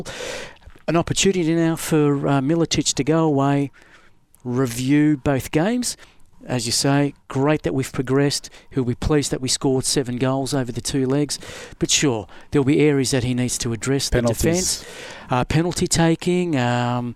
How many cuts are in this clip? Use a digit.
0